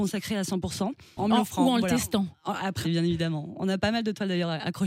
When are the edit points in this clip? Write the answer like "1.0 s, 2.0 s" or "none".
1.2 s, 2.8 s